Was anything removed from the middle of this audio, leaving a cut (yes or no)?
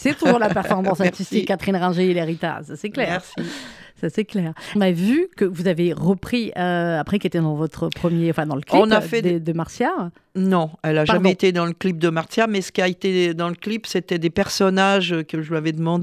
yes